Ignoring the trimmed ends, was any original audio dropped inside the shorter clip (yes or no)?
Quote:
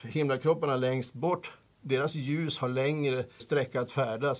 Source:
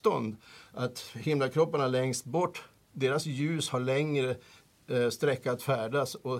yes